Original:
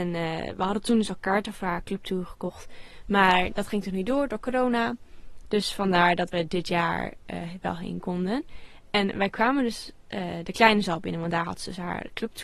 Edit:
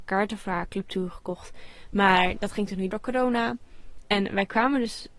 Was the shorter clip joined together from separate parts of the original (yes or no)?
yes